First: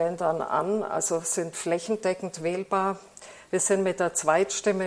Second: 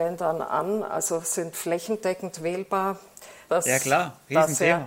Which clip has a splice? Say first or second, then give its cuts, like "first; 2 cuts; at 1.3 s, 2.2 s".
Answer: second; 1 cut; at 3.5 s